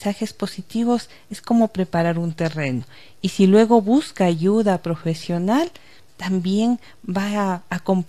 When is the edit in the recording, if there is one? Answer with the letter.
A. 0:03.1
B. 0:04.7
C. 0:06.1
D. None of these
C